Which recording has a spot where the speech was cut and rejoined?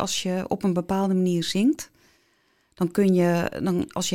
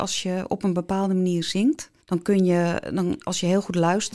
second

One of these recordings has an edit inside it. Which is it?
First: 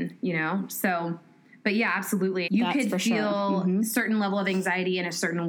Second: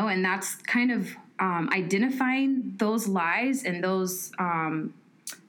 first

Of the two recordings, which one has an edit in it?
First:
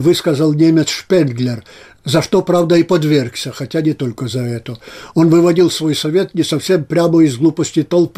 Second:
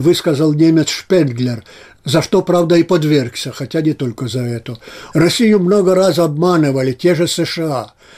second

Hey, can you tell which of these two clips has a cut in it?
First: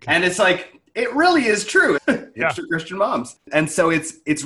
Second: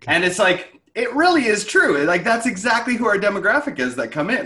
first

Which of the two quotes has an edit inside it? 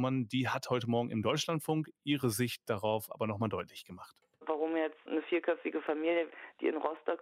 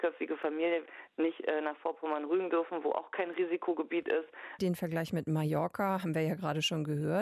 second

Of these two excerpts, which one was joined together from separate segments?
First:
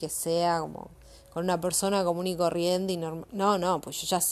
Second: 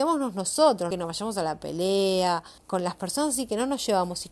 second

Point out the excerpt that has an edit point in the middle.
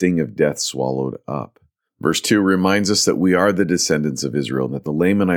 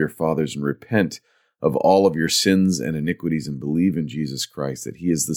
first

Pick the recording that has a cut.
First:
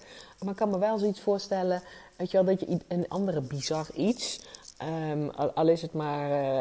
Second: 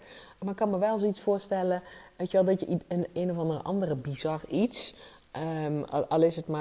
first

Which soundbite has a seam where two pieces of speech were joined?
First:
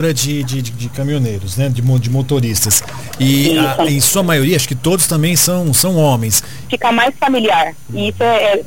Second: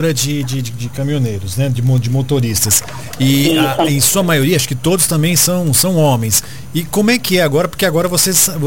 first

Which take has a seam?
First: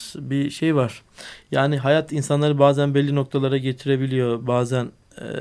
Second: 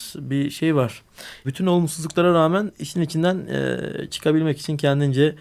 second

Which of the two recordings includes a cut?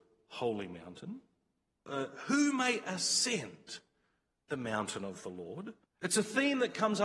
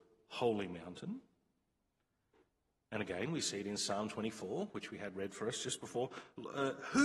first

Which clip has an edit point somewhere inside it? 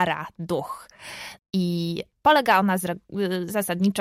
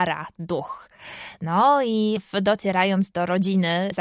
first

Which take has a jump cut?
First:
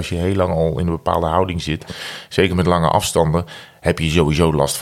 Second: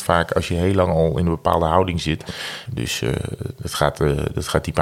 second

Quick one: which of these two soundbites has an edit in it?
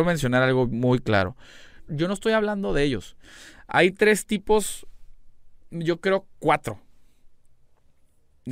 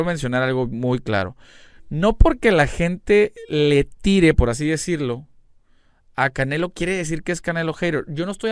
first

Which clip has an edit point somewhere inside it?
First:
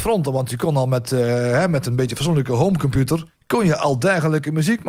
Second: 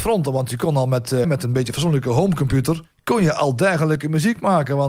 second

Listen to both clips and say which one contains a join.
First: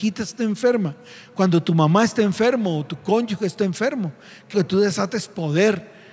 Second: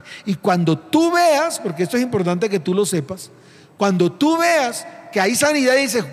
first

